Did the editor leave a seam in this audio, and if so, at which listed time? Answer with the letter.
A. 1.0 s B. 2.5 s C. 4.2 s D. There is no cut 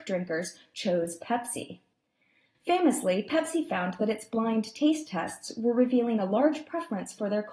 B